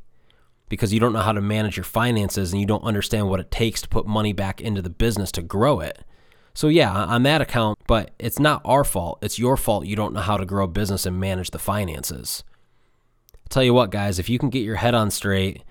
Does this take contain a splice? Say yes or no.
yes